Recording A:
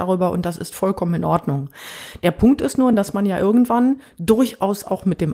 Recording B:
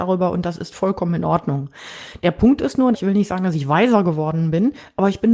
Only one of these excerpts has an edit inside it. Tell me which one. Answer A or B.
B